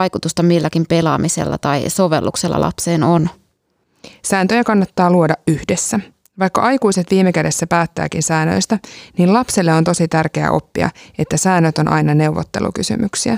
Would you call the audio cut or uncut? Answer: uncut